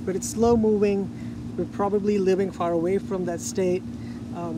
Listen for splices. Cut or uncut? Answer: cut